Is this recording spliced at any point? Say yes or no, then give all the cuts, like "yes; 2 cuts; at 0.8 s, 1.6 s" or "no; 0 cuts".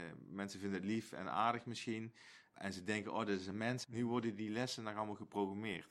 yes; 1 cut; at 3.8 s